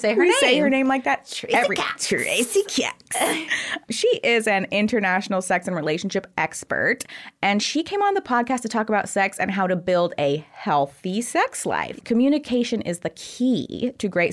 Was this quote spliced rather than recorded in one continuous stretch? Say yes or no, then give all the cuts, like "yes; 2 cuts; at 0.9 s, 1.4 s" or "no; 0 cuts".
yes; 1 cut; at 12.0 s